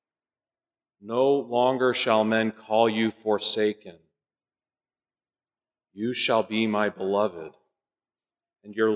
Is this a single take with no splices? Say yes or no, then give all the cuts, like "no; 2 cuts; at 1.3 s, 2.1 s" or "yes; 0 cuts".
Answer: yes; 0 cuts